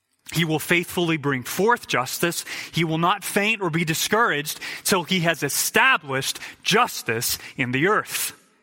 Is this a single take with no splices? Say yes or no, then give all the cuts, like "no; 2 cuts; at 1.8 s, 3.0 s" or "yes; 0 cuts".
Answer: yes; 0 cuts